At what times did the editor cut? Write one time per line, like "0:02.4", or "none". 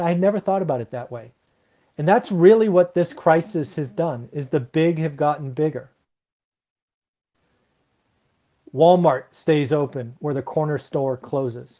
none